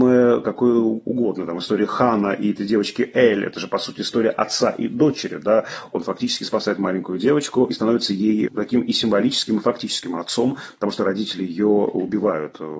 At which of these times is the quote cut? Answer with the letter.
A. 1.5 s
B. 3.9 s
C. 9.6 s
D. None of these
D